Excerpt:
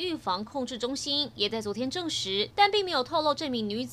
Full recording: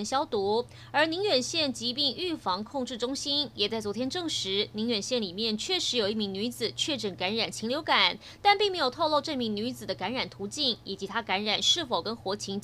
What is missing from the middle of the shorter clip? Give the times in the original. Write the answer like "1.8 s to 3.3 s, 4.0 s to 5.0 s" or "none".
4.7 s to 8.4 s

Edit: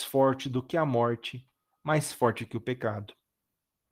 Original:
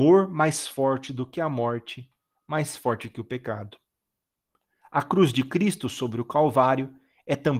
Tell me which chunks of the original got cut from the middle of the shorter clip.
none

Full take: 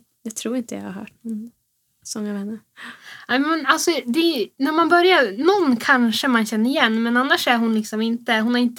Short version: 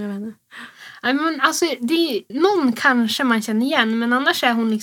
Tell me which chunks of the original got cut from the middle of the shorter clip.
4.6 s to 5.3 s

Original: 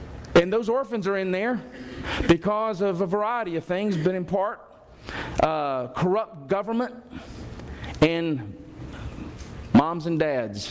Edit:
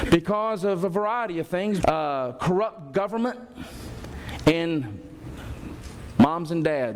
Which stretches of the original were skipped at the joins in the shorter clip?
4.0 s to 5.3 s

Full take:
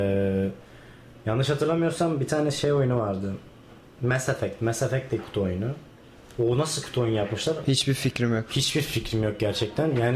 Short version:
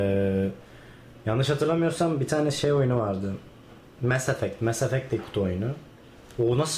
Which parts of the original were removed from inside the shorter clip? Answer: none

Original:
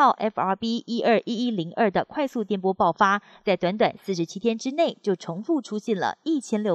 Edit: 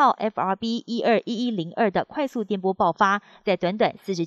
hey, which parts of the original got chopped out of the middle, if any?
none

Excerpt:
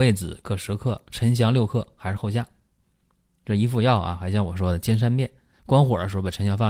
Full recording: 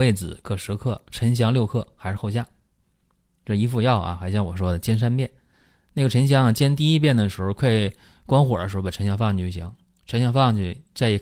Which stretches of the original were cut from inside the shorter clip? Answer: 5.6 s to 8.2 s

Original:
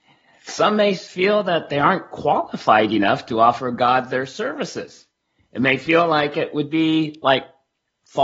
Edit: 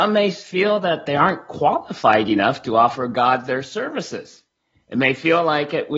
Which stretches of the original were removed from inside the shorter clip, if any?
none

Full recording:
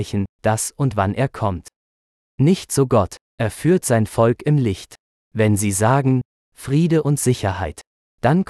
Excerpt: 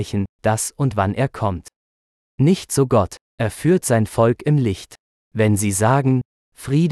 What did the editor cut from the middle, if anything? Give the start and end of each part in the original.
none

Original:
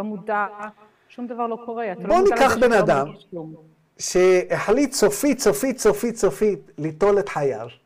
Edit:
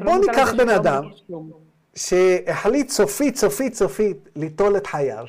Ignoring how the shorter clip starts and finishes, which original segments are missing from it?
5.8 s to 6.1 s

